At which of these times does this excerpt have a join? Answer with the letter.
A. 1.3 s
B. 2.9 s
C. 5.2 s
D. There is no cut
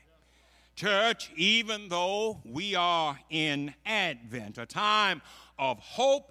D